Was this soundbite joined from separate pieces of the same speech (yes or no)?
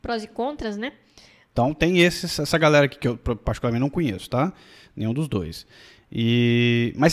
yes